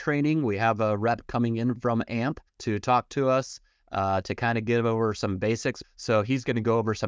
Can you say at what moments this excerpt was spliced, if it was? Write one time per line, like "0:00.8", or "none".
0:02.5
0:05.8

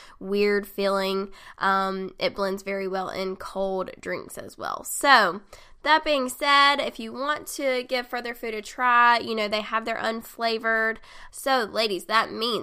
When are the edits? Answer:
0:11.3

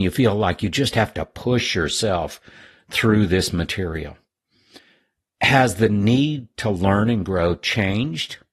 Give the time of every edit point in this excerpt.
none

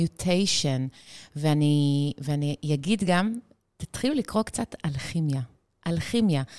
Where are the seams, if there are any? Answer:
0:03.6

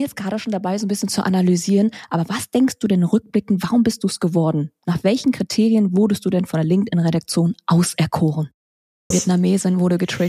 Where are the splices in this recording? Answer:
0:09.1

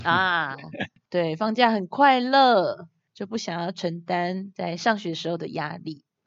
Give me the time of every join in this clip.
none

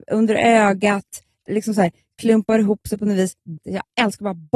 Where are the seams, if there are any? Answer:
0:01.5
0:03.6

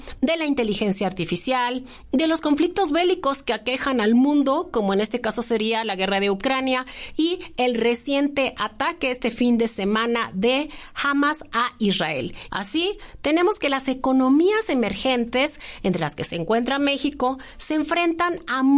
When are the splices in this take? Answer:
0:12.5

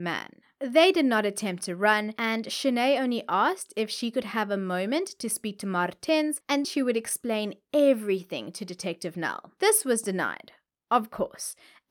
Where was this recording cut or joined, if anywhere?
0:06.6

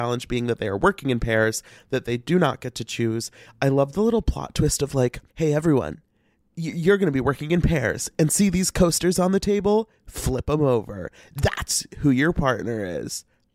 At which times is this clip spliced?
0:05.3

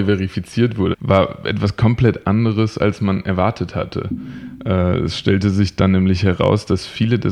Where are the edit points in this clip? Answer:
0:00.9

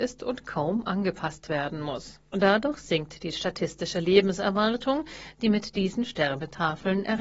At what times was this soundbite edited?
0:02.3

